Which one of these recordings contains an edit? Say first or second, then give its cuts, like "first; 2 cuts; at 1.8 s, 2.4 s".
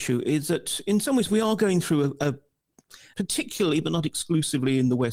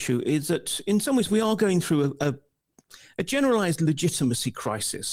first; 1 cut; at 3.1 s